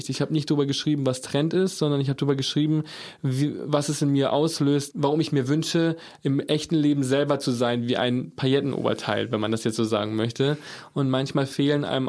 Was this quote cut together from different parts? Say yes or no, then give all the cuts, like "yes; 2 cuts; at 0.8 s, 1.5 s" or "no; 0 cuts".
yes; 2 cuts; at 4.9 s, 10.9 s